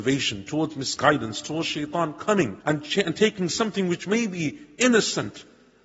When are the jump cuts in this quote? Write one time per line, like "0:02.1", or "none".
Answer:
0:02.6